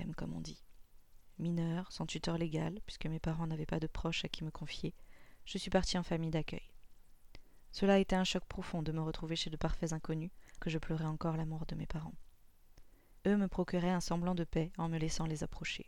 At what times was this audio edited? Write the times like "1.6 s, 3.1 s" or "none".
10.6 s, 13.2 s